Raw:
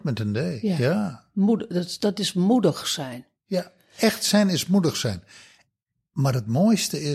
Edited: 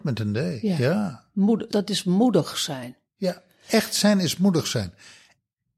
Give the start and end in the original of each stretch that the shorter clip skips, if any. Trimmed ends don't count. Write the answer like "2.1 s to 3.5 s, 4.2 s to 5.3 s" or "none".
1.7 s to 2.0 s